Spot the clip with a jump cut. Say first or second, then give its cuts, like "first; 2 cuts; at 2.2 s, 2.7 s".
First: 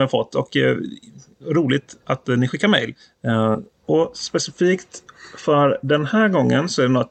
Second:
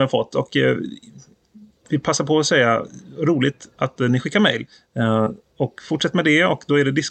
first; 2 cuts; at 1.4 s, 3.8 s